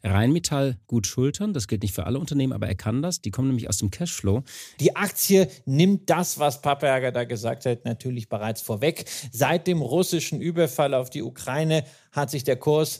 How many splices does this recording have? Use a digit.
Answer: 1